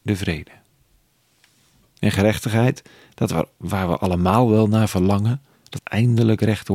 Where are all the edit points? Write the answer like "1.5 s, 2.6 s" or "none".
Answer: 5.8 s